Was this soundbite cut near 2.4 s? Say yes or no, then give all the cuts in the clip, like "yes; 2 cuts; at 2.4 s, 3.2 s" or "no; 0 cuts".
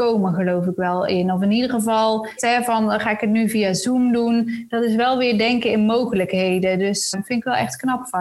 yes; 2 cuts; at 2.4 s, 7.1 s